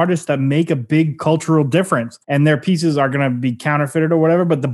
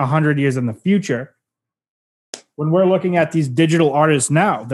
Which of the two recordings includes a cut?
first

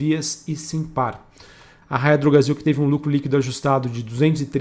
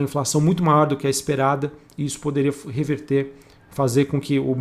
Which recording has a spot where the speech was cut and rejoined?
first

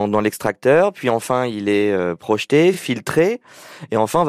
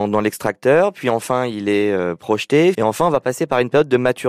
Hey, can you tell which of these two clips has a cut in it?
second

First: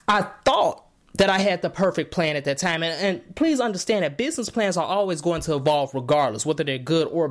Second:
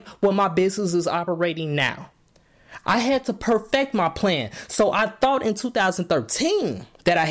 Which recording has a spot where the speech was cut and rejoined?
second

